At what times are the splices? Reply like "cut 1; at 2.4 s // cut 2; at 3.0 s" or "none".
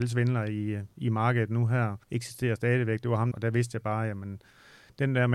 cut 1; at 2.0 s // cut 2; at 3.3 s